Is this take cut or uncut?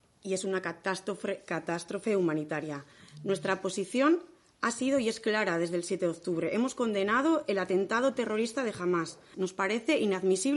cut